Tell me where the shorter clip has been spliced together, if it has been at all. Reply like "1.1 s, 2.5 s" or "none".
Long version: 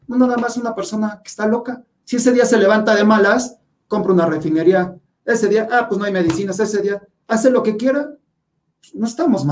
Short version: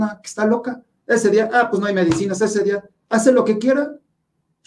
1.0 s